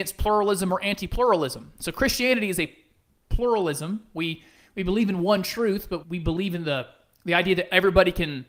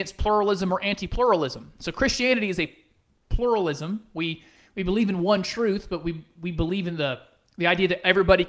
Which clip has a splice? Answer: first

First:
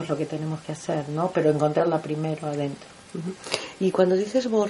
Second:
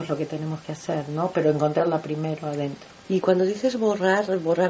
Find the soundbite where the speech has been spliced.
second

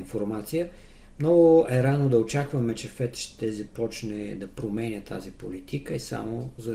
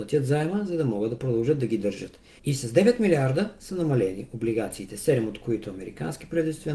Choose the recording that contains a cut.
second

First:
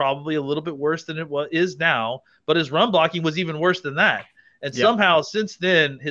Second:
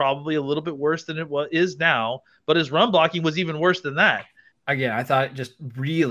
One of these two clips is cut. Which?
second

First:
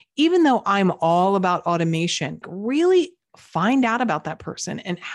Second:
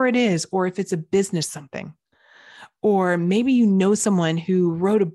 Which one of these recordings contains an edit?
first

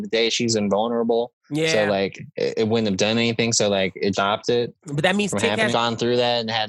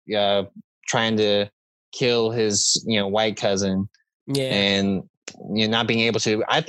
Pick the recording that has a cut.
first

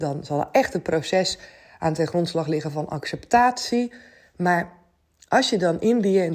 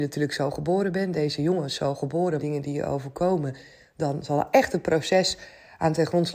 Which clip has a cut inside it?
second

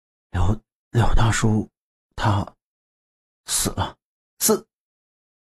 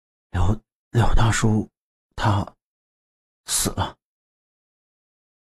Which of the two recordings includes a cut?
first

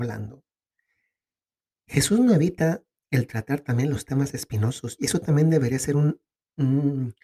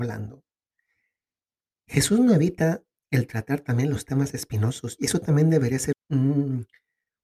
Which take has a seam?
second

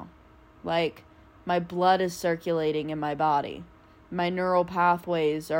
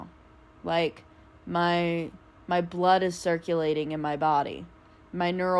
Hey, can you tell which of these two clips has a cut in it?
first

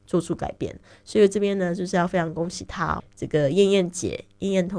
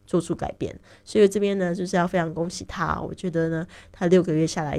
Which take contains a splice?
first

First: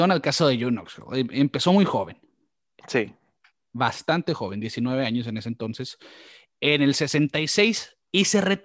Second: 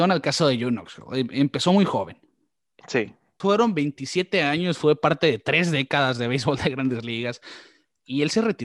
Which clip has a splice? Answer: second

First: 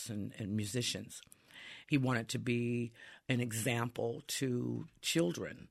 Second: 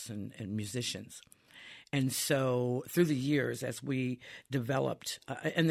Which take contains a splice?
first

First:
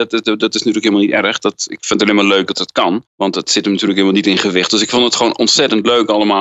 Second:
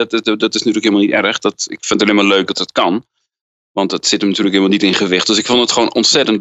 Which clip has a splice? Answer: first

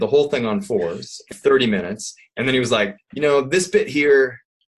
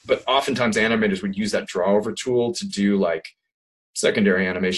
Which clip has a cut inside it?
first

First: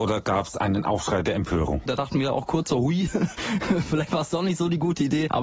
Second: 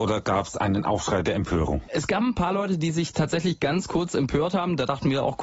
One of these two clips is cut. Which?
first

